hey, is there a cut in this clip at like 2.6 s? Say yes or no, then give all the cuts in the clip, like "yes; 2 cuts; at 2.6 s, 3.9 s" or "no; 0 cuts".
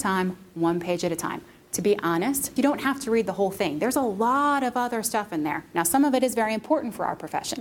yes; 1 cut; at 2.6 s